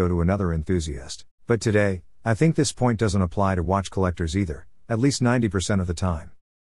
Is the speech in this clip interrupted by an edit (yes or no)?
yes